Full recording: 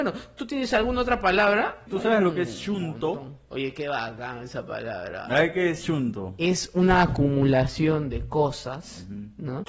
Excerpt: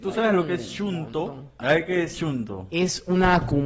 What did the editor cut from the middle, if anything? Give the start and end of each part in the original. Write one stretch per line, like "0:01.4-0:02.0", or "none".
0:03.5-0:05.3